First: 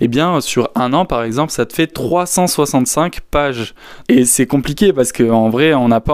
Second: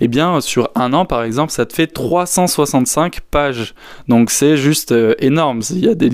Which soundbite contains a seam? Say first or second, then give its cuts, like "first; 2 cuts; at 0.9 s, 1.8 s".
first; 1 cut; at 4.0 s